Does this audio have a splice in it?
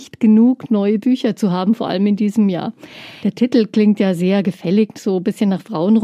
yes; 1 cut; at 3.2 s

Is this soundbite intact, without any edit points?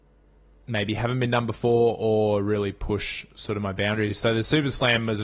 yes; 0 cuts

